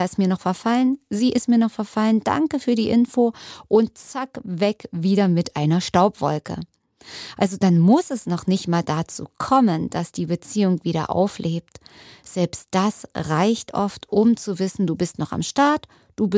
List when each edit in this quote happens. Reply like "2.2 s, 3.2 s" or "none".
none

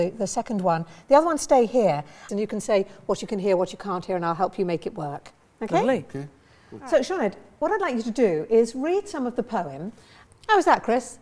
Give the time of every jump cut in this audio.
2.3 s, 10.3 s

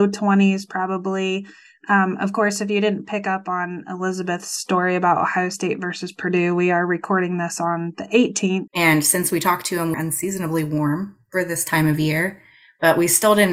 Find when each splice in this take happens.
8.7 s, 9.9 s

